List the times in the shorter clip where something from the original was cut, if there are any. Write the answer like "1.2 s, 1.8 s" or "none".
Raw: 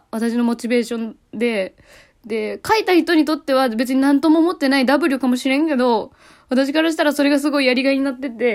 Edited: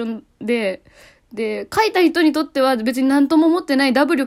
none